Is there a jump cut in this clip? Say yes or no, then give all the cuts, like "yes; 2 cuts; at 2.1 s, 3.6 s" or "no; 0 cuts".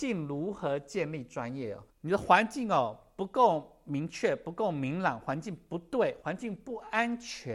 yes; 2 cuts; at 1.9 s, 6.2 s